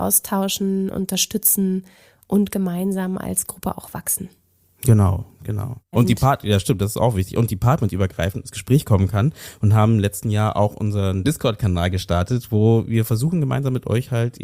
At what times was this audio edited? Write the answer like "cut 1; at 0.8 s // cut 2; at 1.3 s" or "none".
cut 1; at 5.9 s